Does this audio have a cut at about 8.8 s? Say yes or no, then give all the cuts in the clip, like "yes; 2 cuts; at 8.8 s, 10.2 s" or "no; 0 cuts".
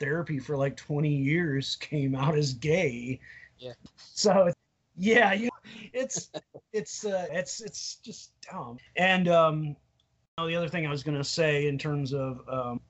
yes; 1 cut; at 8.8 s